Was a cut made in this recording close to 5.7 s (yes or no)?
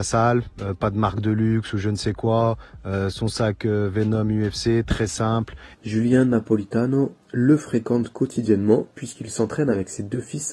yes